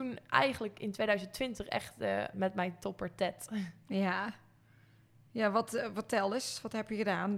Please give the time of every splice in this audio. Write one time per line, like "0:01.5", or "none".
0:02.3